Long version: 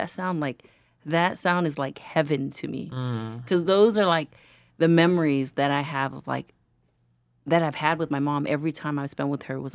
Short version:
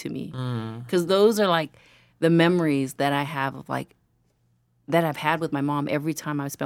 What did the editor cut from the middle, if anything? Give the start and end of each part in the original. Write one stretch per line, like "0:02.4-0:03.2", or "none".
none